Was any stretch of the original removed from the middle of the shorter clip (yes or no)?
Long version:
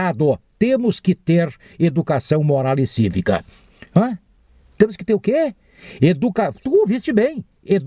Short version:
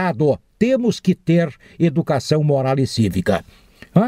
no